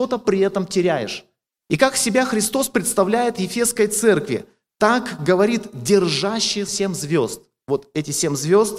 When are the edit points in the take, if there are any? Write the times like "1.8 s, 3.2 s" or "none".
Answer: 1.6 s, 6.7 s